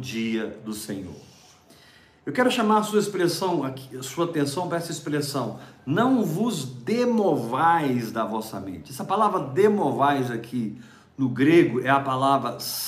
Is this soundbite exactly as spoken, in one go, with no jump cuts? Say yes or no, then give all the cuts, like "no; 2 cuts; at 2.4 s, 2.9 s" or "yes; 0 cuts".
yes; 0 cuts